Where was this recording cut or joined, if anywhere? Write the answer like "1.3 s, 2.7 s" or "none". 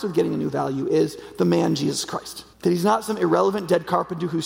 2.5 s